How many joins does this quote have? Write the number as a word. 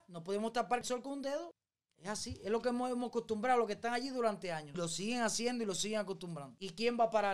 zero